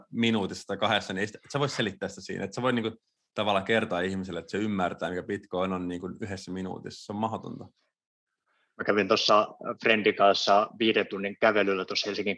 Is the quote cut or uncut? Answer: uncut